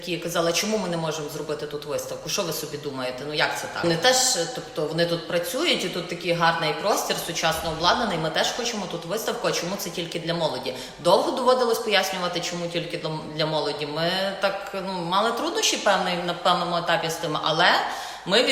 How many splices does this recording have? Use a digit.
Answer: 1